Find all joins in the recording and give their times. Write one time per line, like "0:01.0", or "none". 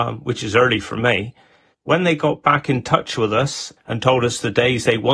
0:01.7
0:03.8